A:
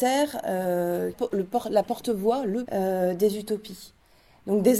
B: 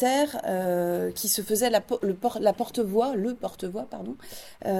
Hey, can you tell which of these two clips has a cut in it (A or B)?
A